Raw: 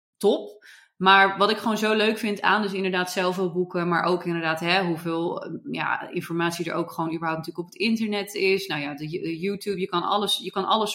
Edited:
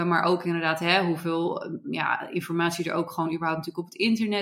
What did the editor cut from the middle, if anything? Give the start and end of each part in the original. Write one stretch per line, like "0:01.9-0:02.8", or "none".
none